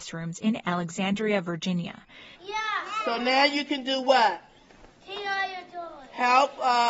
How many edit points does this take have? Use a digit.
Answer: 1